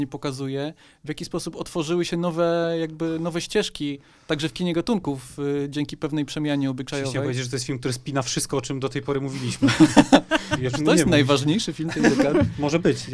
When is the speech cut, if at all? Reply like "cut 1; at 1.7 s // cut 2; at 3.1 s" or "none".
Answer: none